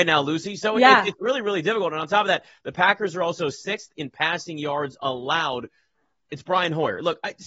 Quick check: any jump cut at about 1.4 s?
no; 0 cuts

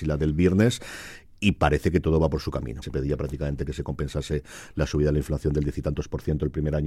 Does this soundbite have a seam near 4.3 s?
no; 1 cut; at 2.8 s

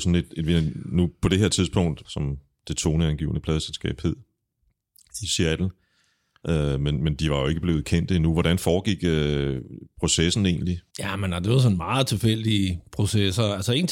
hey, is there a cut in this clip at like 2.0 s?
yes; 2 cuts; at 2.0 s, 10.9 s

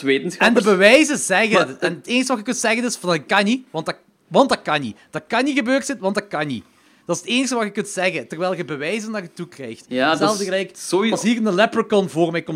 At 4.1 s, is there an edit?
no; 0 cuts

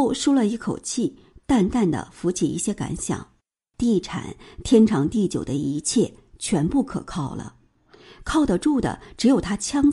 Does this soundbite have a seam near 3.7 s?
yes; 1 cut; at 3.7 s

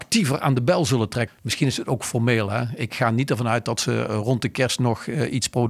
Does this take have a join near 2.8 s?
no; 1 cut; at 1.3 s

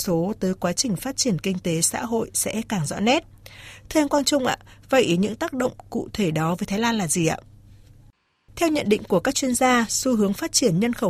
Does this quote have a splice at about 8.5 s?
yes; 1 cut; at 8.5 s

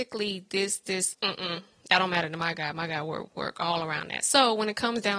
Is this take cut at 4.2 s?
no; 1 cut; at 1.1 s

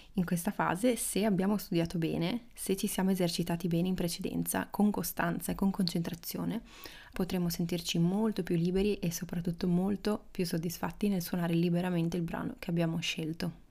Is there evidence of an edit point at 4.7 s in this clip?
no; 1 cut; at 7.1 s

